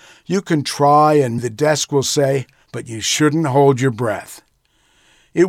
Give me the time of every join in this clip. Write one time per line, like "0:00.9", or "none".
0:01.4
0:02.7